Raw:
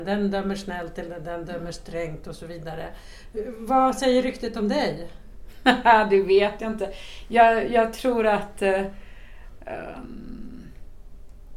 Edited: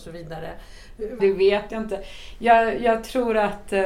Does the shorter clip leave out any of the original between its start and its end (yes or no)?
yes